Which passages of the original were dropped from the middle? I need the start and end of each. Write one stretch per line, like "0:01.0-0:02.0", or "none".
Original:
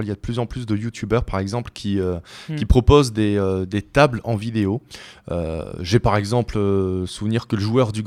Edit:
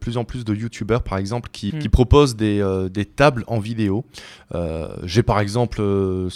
0:01.9-0:02.5